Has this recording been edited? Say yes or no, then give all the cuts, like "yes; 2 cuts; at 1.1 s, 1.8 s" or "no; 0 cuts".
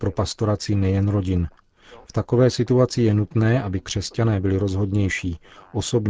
no; 0 cuts